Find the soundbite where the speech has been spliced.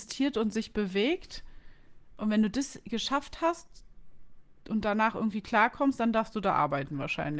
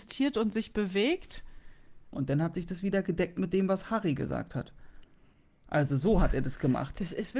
second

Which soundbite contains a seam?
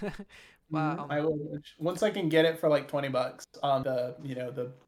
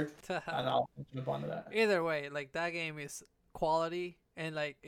first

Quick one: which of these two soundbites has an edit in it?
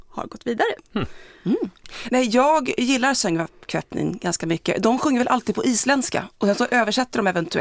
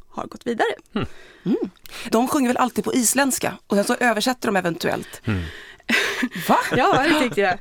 second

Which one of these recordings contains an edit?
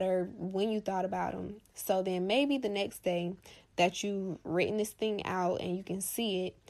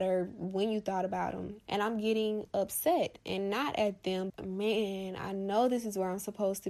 second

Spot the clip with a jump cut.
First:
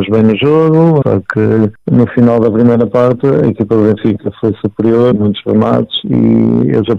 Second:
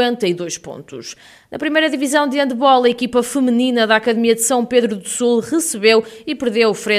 first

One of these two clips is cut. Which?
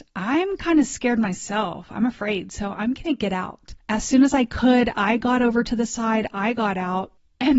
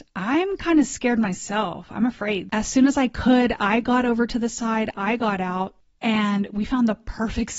second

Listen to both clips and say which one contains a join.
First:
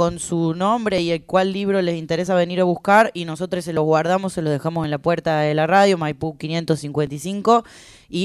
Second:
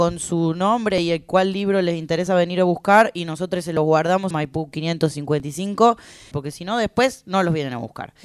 second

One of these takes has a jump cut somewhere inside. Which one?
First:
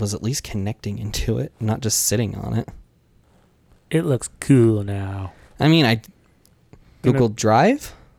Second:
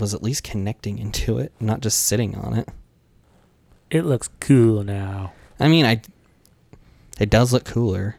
first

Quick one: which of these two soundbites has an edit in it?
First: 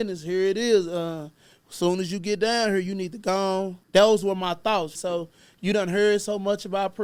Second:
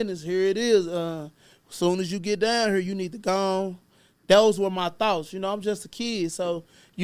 first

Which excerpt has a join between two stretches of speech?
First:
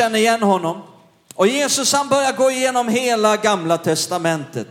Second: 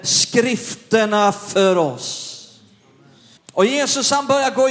second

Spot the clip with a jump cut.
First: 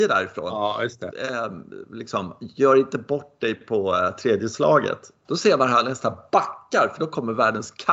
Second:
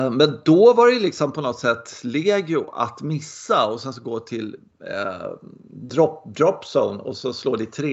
first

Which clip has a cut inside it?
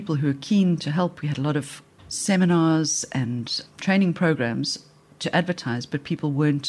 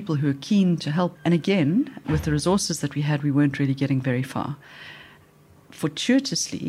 second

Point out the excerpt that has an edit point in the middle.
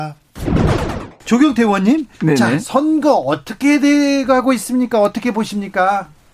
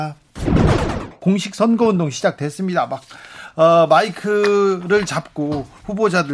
second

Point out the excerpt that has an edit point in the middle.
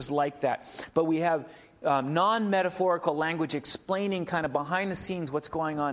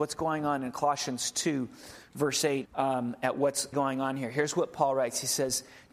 second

